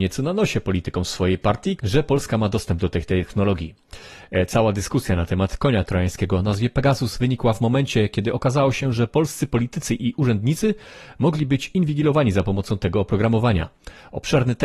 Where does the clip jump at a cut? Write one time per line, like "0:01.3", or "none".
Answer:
0:01.8